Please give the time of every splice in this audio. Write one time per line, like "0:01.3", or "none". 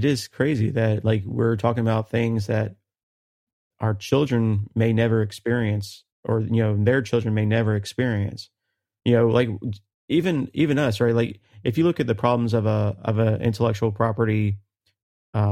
none